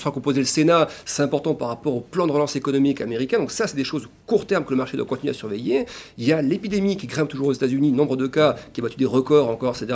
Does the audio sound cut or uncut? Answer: uncut